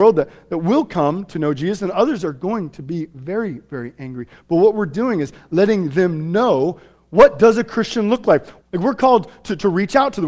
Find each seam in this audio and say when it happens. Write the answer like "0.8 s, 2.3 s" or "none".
8.6 s